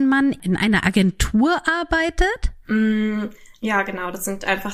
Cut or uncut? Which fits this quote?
cut